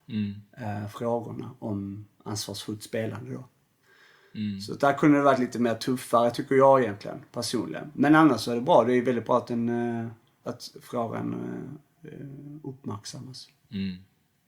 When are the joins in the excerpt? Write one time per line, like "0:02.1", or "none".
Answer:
0:10.4